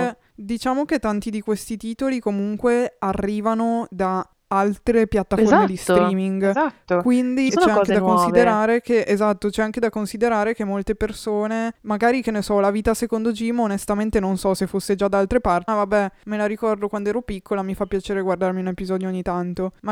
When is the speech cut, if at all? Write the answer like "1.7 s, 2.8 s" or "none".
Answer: 7.5 s, 15.7 s